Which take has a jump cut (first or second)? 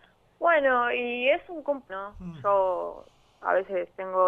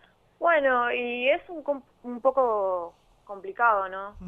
first